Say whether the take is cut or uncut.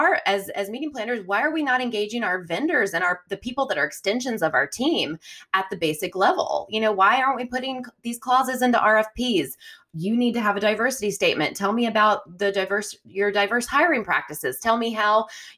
uncut